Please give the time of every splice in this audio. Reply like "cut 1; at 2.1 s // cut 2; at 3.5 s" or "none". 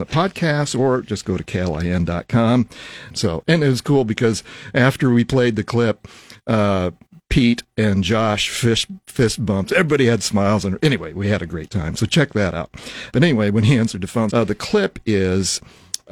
cut 1; at 3.1 s // cut 2; at 13.1 s // cut 3; at 14.3 s